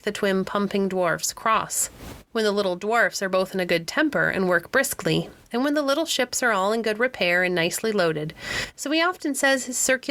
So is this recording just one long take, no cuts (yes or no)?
no